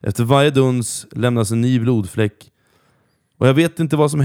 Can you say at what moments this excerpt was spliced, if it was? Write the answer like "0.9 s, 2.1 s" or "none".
none